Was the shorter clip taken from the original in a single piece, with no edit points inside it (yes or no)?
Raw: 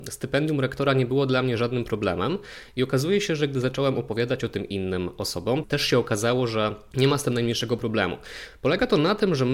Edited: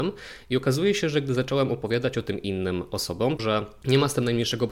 no